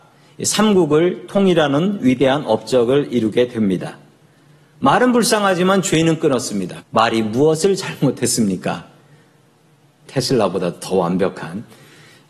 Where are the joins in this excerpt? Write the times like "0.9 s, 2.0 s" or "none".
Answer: 6.8 s, 10.1 s